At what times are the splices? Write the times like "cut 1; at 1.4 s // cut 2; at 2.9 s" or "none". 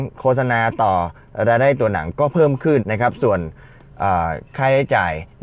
cut 1; at 2.8 s